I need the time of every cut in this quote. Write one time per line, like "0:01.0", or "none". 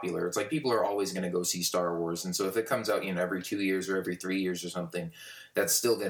none